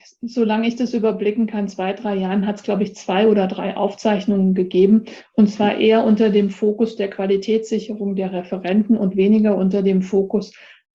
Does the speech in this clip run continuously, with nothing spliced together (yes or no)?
yes